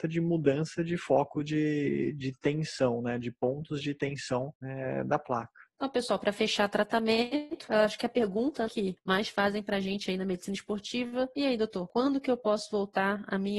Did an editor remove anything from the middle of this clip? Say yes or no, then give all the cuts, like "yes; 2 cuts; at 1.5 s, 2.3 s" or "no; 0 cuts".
yes; 1 cut; at 8.7 s